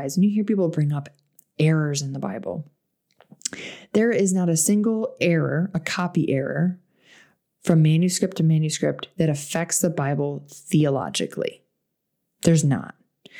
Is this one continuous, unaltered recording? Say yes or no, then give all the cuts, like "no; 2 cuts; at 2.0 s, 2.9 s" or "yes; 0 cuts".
yes; 0 cuts